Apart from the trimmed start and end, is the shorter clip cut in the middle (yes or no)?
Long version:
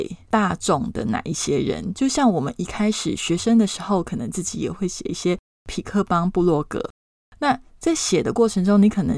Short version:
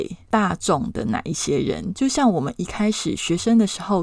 no